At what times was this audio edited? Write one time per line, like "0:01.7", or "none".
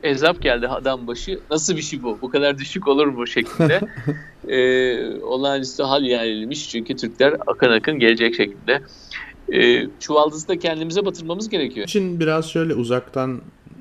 0:10.0
0:11.8